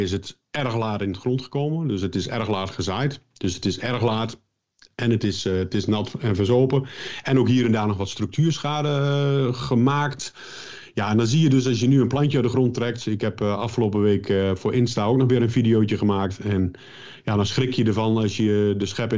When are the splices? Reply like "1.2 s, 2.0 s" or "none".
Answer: none